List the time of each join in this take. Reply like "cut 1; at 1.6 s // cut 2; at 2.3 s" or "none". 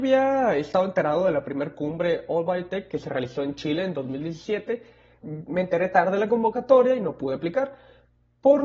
cut 1; at 5.2 s